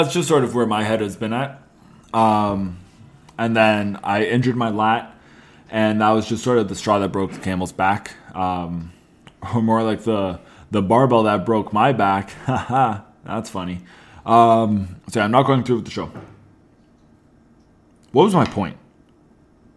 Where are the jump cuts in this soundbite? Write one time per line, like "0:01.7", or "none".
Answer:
0:15.0